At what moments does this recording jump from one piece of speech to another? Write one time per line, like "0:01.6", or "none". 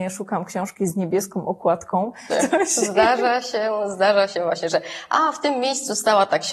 0:02.3